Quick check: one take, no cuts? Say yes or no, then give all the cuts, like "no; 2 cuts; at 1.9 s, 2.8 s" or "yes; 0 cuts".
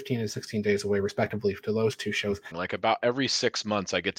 no; 1 cut; at 2.5 s